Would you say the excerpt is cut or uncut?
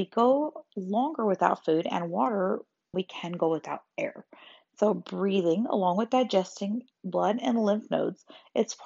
cut